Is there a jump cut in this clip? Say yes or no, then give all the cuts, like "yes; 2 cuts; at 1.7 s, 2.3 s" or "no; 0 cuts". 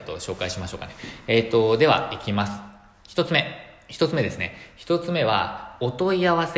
no; 0 cuts